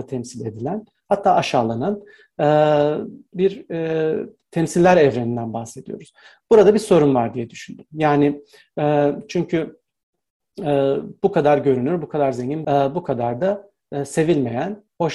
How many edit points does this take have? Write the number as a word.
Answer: two